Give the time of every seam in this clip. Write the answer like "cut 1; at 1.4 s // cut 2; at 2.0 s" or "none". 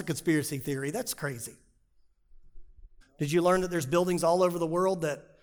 cut 1; at 3.0 s